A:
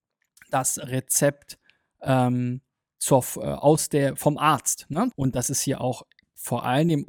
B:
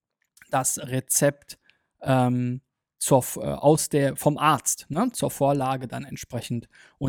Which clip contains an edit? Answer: A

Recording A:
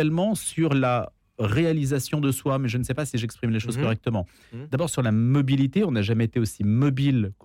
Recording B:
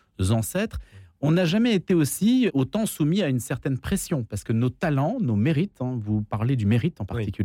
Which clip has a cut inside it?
B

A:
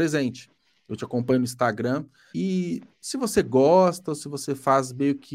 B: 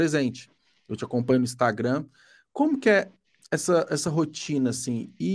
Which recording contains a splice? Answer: A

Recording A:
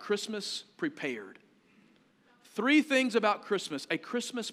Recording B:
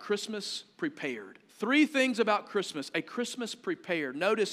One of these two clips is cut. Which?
B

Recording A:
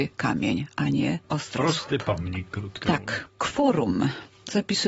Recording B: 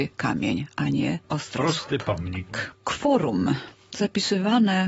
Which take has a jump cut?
B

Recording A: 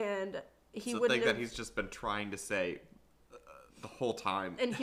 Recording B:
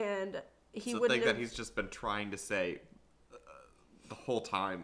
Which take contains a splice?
A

